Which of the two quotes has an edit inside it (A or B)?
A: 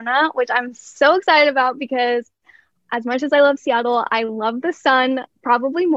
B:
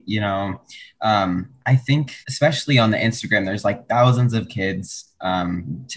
B